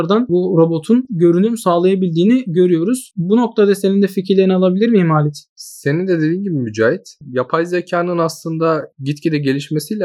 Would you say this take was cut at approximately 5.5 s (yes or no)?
yes